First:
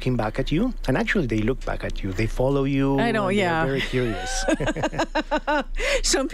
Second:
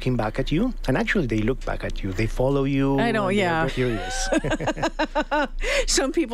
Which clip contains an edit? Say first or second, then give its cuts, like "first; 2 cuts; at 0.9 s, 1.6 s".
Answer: second; 1 cut; at 3.7 s